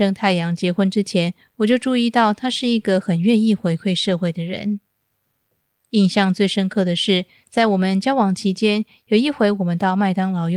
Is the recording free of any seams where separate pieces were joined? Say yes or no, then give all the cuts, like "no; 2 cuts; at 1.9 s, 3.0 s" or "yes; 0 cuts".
yes; 0 cuts